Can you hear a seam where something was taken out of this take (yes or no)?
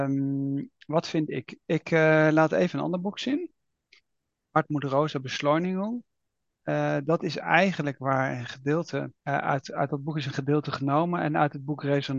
yes